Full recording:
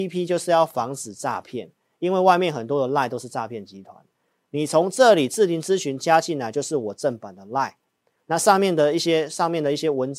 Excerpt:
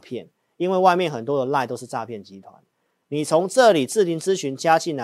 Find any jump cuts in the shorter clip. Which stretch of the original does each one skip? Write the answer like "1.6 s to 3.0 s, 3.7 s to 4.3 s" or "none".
none